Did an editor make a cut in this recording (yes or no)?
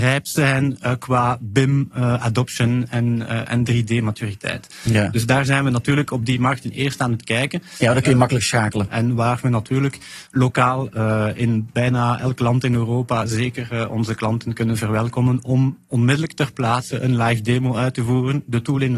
yes